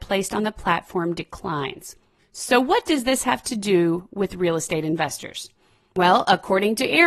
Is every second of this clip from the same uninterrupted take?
yes; 0 cuts

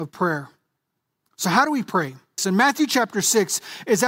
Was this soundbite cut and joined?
yes; 1 cut; at 2.4 s

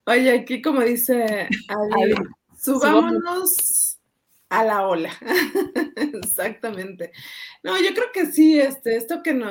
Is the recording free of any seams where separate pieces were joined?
yes; 0 cuts

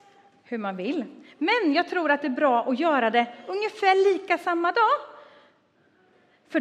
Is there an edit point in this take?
no; 0 cuts

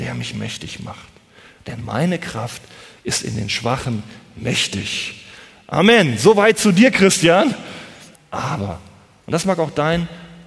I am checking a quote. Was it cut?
yes; 1 cut; at 8.1 s

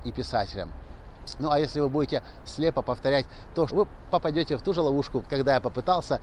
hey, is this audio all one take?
no; 3 cuts; at 2.5 s, 3.7 s, 5.2 s

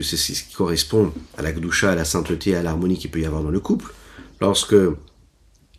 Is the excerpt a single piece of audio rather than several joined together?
no; 1 cut; at 1.3 s

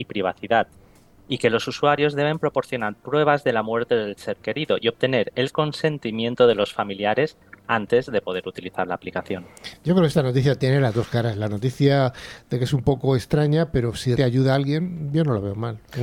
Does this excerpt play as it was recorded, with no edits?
no; 1 cut; at 14.2 s

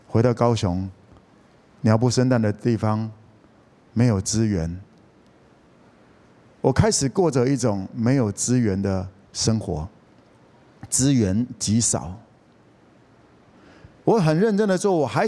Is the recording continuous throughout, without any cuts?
yes; 0 cuts

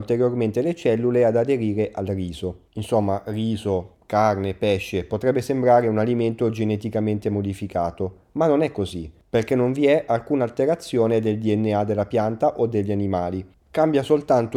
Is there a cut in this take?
no; 0 cuts

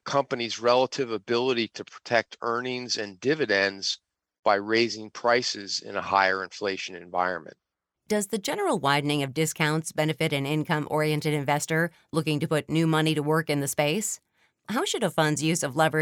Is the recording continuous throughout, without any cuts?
no; 1 cut; at 7.9 s

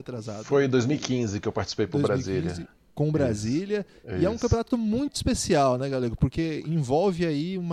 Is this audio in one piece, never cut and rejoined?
yes; 0 cuts

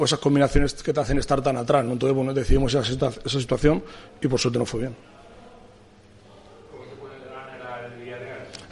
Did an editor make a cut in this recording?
no; 0 cuts

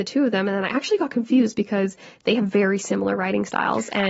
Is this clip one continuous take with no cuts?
yes; 0 cuts

